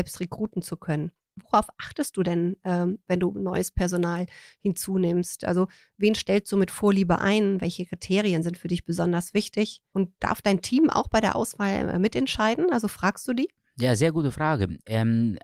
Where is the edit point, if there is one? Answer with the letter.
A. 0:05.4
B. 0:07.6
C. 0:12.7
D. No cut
D